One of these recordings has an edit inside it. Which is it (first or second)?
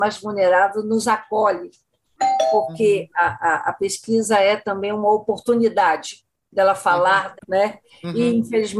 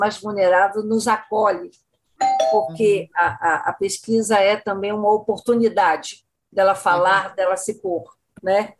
first